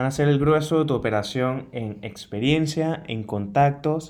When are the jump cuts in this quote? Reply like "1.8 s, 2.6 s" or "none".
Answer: none